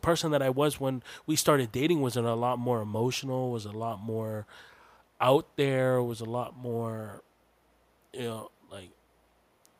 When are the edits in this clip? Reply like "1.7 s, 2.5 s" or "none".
none